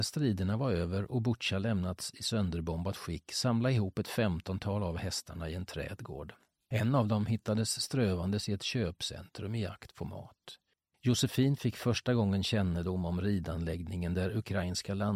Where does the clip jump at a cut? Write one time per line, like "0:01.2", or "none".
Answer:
none